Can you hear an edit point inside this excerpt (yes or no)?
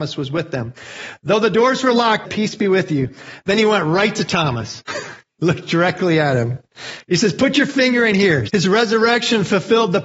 yes